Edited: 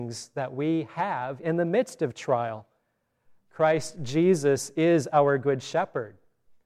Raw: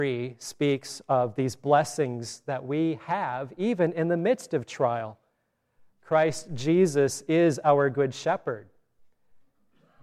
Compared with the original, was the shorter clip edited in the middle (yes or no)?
yes